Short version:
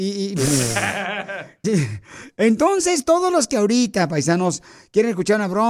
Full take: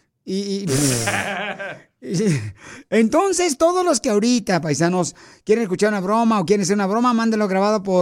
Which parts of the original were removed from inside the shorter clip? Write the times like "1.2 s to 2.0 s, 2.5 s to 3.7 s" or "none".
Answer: 1.9 s to 2.2 s